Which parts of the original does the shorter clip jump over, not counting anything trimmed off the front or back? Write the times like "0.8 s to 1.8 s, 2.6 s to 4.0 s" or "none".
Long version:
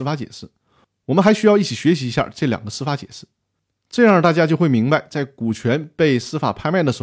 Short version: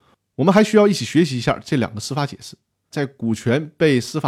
3.6 s to 5.1 s